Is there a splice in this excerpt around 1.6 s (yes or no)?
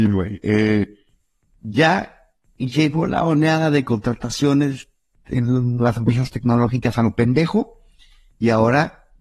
yes